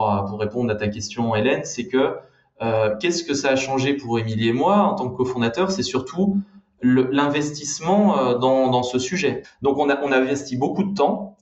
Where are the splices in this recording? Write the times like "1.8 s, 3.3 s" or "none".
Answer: 9.4 s